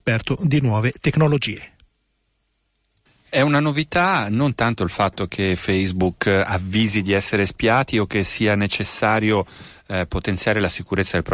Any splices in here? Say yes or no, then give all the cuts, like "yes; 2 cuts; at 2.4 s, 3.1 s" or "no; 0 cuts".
no; 0 cuts